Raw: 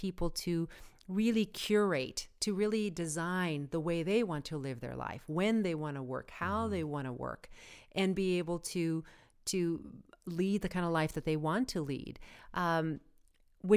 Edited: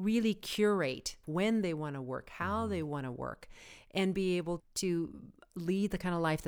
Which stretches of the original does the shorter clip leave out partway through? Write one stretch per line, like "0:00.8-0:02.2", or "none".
0:02.3-0:05.2
0:08.6-0:09.3